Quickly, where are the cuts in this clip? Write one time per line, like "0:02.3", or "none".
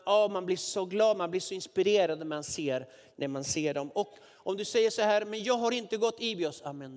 none

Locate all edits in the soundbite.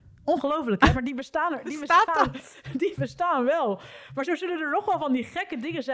none

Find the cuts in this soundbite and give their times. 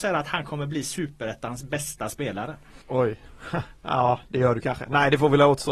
0:02.8

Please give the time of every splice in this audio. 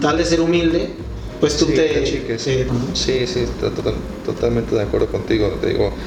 0:02.7

